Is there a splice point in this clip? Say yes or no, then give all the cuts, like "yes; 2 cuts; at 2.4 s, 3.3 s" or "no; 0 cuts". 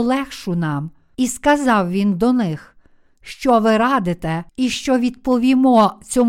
yes; 2 cuts; at 1.1 s, 4.5 s